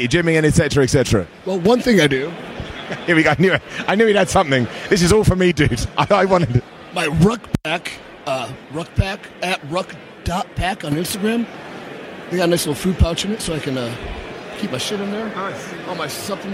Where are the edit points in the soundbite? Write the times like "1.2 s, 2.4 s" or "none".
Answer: 8.6 s